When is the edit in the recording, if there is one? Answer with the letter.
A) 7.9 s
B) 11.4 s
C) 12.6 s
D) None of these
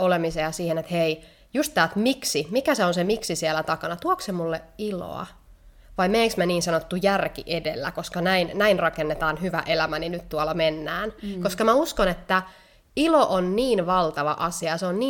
D